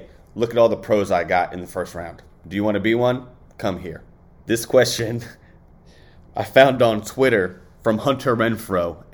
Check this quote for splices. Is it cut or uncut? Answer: cut